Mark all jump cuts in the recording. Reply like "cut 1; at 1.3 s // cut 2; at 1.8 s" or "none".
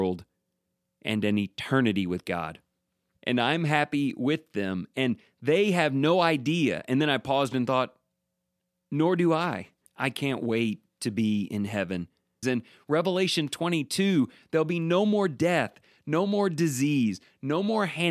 cut 1; at 3.2 s // cut 2; at 9.9 s // cut 3; at 12.4 s